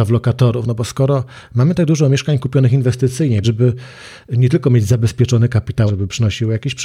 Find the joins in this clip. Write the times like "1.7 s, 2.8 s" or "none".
3.4 s, 5.9 s